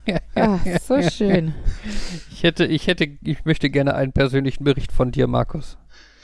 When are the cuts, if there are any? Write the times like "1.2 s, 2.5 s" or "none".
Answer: none